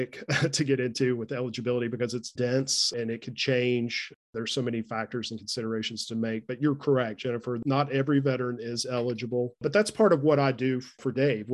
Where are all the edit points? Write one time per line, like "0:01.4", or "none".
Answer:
0:02.4